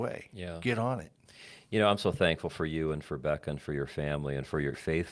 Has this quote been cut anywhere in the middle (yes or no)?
no